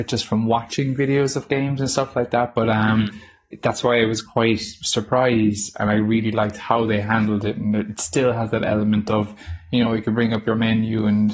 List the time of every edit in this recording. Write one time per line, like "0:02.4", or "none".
none